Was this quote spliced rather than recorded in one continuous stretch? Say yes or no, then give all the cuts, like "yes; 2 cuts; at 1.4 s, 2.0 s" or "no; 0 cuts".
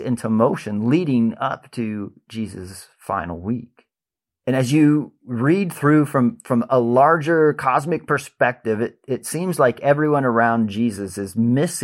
no; 0 cuts